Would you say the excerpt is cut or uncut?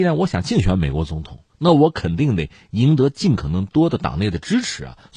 cut